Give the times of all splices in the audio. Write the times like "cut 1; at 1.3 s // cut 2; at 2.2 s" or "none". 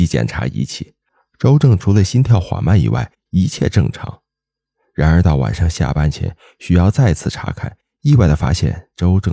none